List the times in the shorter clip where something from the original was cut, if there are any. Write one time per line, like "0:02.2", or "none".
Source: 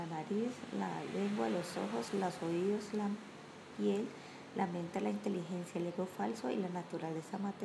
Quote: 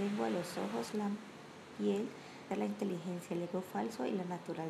0:00.9
0:02.5